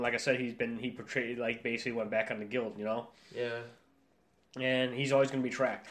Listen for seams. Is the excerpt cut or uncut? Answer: uncut